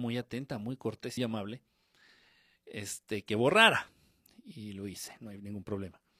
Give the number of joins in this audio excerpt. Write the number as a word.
one